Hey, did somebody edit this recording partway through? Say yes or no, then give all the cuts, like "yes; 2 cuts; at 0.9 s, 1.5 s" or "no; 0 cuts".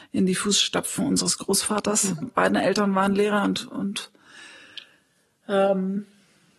yes; 1 cut; at 2.2 s